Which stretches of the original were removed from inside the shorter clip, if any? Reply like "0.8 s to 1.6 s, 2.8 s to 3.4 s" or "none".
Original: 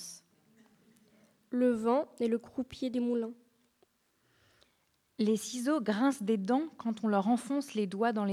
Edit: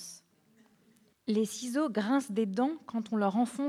1.1 s to 5.0 s